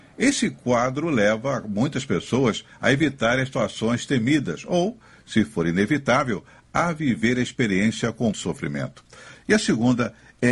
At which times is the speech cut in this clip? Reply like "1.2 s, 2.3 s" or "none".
8.3 s, 9.3 s